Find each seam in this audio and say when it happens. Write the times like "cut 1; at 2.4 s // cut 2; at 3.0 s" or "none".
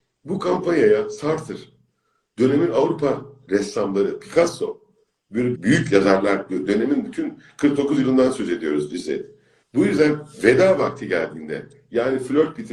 cut 1; at 5.5 s // cut 2; at 9.6 s

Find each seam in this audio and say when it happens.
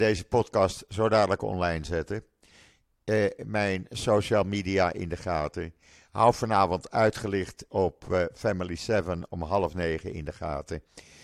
cut 1; at 3.4 s

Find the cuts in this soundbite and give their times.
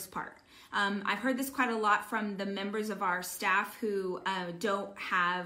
none

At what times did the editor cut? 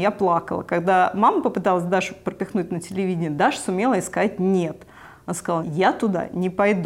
cut 1; at 5.6 s

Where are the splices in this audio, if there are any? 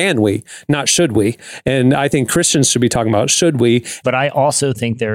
cut 1; at 4.0 s

